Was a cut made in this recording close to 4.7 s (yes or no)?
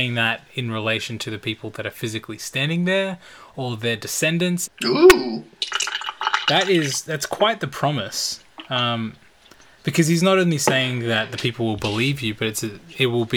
yes